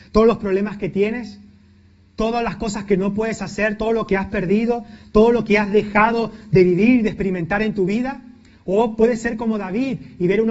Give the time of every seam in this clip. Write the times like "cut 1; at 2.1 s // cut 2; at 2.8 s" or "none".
none